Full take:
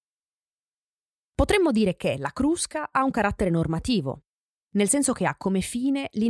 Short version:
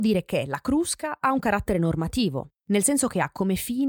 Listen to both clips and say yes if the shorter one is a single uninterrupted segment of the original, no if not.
no